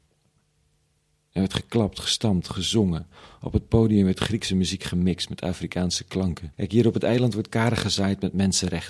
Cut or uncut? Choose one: cut